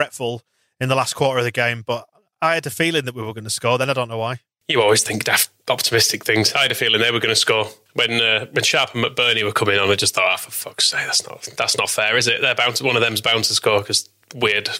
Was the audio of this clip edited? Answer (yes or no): no